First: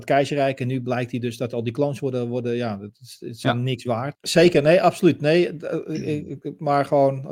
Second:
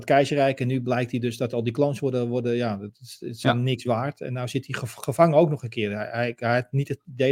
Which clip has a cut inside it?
first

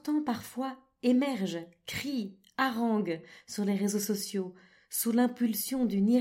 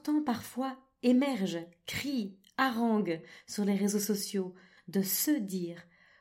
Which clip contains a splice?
second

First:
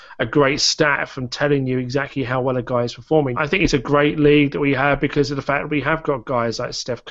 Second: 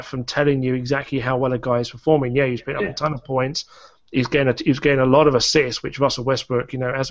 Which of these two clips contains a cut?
first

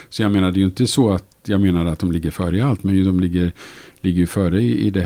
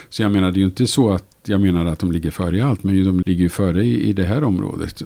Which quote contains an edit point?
second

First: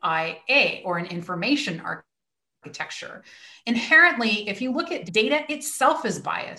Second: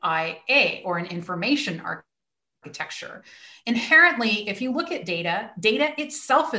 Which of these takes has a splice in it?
first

